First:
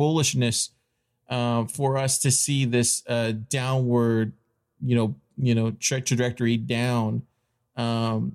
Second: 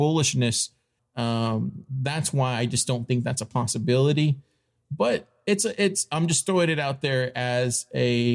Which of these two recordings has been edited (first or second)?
second